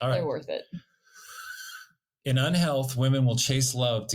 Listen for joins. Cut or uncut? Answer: uncut